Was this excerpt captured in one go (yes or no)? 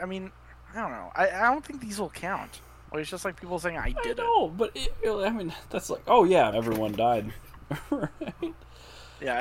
no